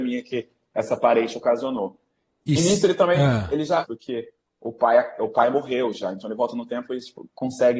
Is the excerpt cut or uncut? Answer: cut